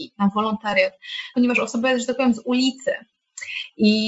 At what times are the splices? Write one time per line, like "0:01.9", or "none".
0:01.3